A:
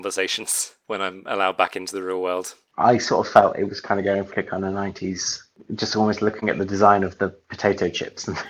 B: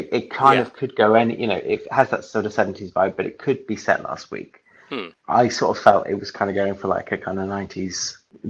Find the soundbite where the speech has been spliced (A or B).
A